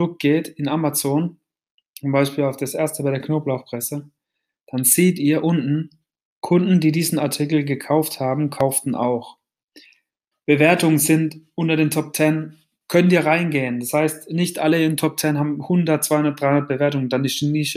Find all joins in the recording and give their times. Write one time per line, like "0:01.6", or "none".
0:10.3